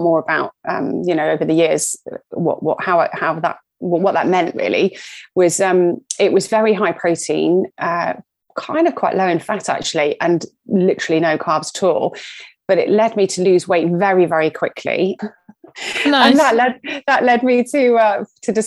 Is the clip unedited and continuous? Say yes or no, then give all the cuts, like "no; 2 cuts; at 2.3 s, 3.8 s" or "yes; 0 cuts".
no; 1 cut; at 15.2 s